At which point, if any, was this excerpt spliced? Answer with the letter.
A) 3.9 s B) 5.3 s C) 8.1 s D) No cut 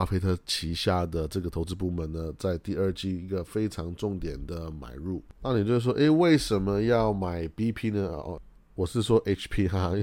D